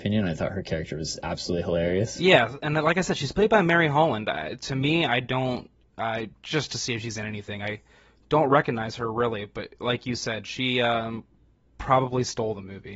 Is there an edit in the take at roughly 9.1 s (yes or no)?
no